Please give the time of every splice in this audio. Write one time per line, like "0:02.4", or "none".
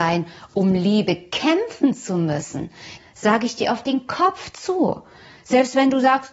0:03.0

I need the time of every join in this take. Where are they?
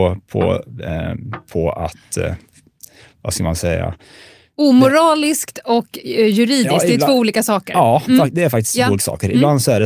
none

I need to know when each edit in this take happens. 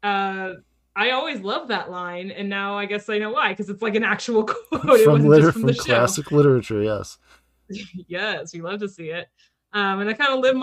none

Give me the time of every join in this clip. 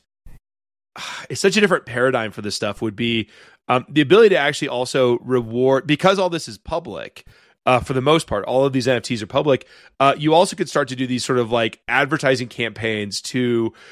none

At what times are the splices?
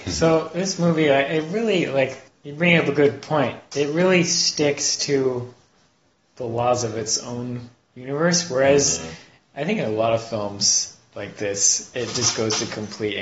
none

